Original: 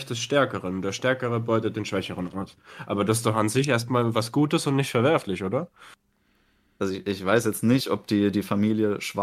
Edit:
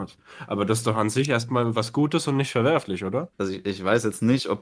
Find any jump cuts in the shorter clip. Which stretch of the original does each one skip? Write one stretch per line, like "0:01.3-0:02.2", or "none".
0:05.7-0:06.7